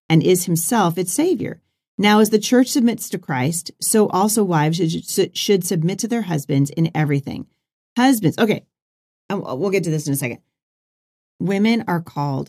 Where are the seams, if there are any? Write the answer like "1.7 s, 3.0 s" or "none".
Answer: none